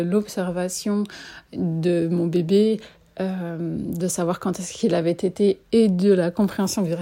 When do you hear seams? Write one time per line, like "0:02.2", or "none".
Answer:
none